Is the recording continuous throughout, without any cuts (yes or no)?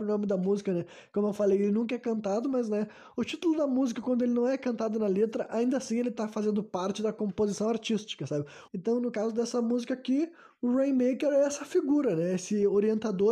no